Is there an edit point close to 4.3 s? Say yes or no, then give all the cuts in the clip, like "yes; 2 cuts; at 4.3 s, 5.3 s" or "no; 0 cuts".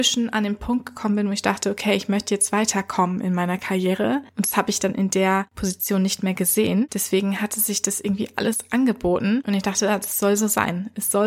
no; 0 cuts